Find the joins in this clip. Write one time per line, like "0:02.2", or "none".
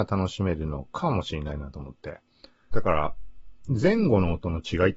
0:02.7